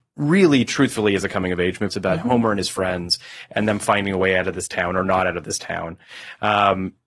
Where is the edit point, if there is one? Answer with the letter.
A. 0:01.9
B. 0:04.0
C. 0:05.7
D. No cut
A